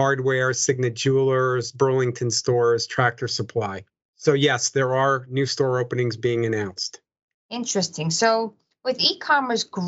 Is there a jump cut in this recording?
no; 0 cuts

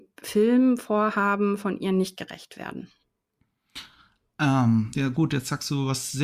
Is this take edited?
no; 0 cuts

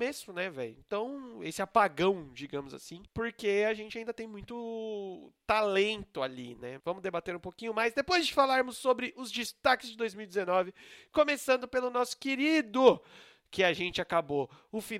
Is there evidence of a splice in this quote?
yes; 1 cut; at 6.8 s

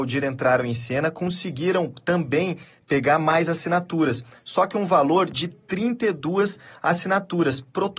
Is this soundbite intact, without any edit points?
yes; 0 cuts

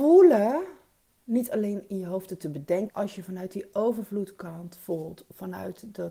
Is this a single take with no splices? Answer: no; 1 cut; at 2.9 s

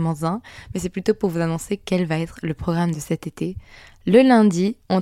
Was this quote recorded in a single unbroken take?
yes; 0 cuts

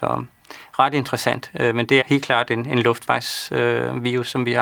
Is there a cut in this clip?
yes; 1 cut; at 2.0 s

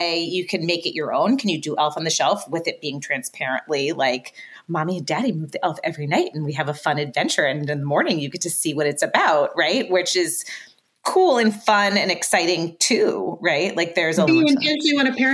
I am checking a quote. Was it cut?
yes; 1 cut; at 14.3 s

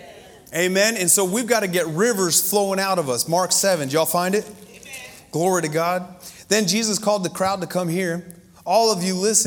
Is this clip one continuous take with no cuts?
yes; 0 cuts

